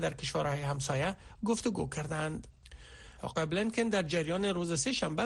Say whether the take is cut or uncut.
cut